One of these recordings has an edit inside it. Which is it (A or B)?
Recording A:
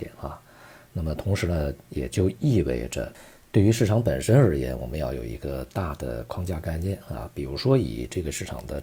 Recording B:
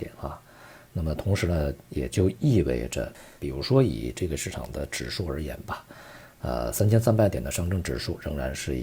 B